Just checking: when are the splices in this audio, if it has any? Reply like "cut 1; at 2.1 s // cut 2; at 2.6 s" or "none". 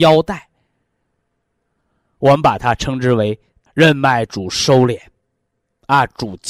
cut 1; at 3.7 s